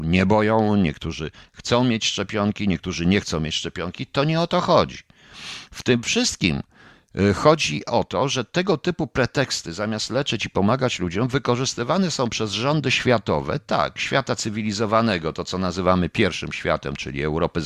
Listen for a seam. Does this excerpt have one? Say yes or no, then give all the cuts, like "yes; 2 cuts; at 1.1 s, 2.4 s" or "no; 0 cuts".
no; 0 cuts